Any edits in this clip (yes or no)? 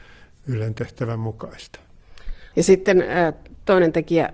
yes